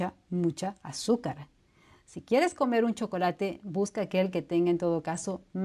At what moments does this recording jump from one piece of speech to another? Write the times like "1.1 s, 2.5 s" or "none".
none